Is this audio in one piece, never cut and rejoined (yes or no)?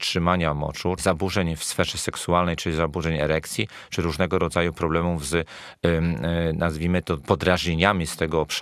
no